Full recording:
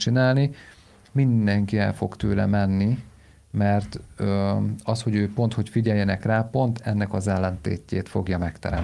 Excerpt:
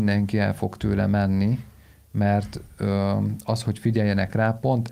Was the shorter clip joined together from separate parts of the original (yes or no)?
yes